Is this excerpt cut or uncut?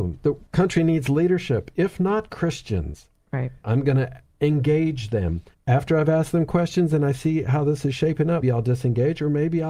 cut